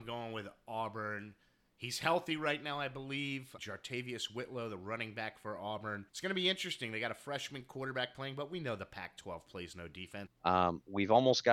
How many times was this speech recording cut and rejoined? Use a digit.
3